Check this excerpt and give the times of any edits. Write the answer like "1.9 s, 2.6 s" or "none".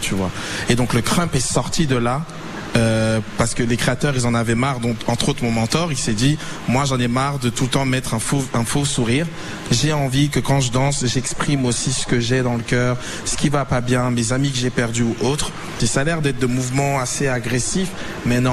15.8 s